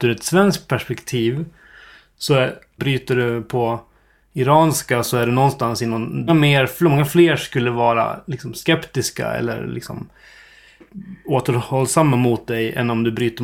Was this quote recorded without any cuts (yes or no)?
no